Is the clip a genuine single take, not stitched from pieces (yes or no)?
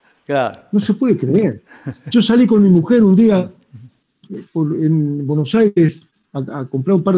yes